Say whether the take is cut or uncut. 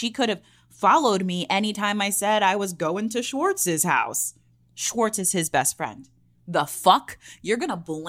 uncut